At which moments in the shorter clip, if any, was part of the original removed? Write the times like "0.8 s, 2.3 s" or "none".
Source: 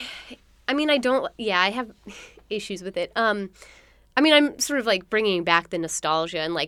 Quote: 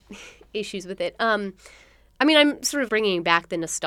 2.9 s